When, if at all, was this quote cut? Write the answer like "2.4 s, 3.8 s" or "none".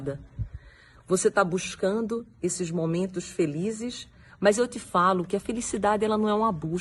1.0 s